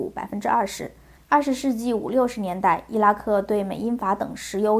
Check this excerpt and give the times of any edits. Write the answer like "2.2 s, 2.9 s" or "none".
1.2 s